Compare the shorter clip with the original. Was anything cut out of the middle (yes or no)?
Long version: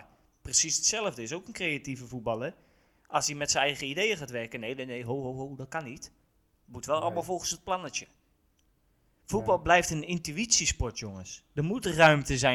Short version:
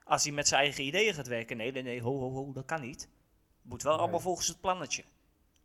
no